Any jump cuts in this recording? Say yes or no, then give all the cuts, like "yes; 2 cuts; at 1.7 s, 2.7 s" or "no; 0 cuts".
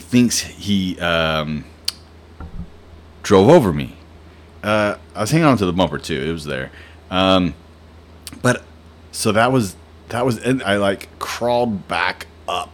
yes; 3 cuts; at 4.6 s, 9.0 s, 10.6 s